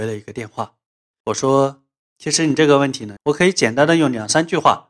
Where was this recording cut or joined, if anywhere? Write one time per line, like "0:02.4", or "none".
0:01.2
0:03.2